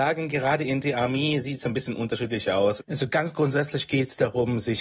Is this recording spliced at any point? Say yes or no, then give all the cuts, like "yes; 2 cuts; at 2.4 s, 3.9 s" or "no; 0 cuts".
yes; 1 cut; at 2.8 s